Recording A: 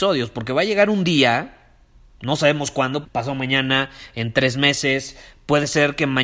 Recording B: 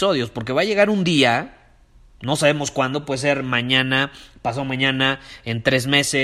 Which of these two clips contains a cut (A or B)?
A